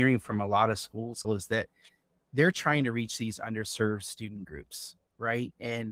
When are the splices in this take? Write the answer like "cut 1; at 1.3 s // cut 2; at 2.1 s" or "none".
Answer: cut 1; at 1.2 s